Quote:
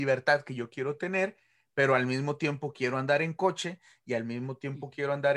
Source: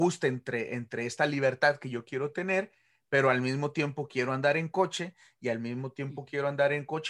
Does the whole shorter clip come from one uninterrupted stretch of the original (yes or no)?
yes